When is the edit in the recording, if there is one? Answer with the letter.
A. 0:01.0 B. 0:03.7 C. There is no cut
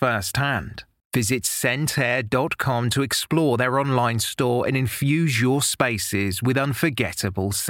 A